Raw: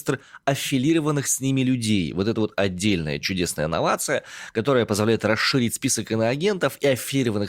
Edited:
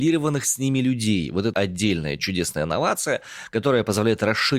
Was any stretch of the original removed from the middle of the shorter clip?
yes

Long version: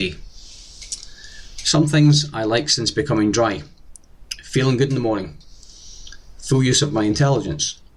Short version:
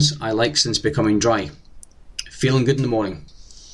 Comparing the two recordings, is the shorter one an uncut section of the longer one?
yes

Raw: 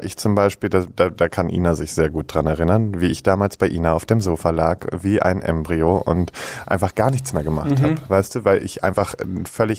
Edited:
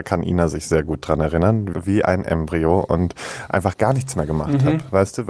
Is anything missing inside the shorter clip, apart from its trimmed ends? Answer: yes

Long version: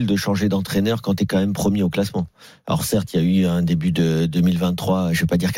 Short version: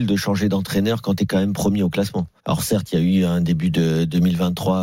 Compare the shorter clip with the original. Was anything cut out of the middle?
yes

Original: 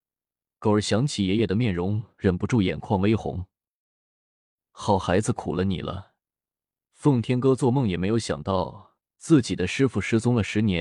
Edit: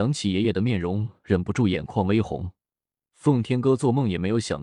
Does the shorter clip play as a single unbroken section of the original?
no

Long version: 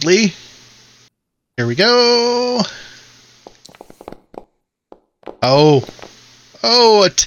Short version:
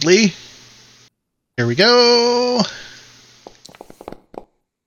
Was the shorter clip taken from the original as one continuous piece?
yes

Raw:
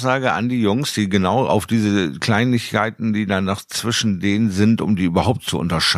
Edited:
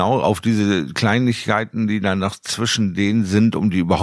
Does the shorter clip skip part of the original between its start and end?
no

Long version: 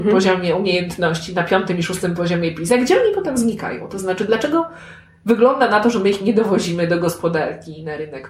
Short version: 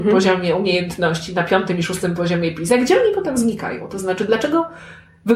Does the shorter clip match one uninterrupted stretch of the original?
yes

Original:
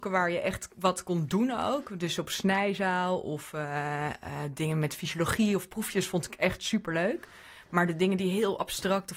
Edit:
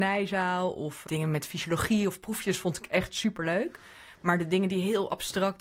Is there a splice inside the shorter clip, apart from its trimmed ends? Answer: yes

